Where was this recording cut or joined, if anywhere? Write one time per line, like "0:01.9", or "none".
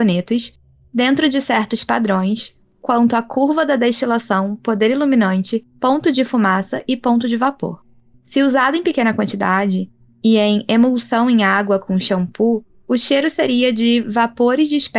0:08.1